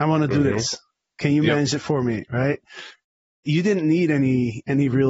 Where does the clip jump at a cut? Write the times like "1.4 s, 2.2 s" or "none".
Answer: none